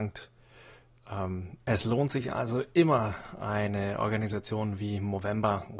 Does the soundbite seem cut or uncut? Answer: cut